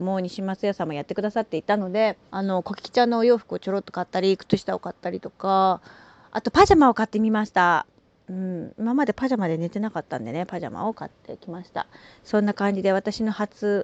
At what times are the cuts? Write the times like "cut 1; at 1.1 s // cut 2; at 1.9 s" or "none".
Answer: cut 1; at 2.3 s